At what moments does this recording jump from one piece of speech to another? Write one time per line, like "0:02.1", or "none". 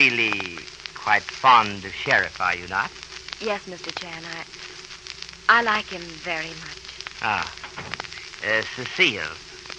0:07.1